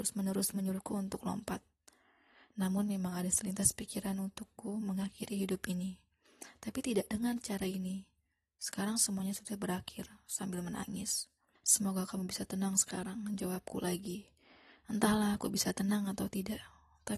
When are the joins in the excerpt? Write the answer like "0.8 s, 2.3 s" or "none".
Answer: 11.6 s